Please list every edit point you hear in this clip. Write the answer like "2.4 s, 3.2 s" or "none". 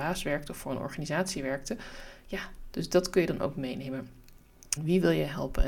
2.7 s, 4.8 s